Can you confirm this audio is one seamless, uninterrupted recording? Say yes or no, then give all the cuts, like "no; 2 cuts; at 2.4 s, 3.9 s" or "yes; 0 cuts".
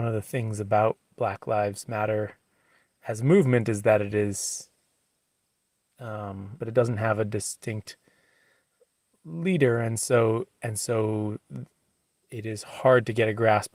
no; 1 cut; at 6.6 s